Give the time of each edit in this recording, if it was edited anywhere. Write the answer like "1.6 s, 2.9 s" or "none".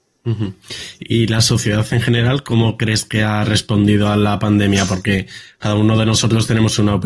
none